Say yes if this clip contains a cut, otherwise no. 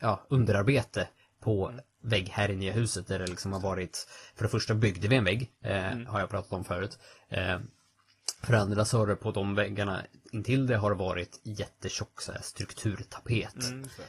no